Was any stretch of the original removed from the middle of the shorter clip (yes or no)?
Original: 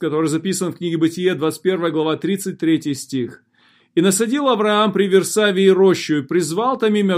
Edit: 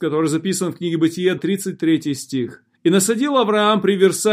yes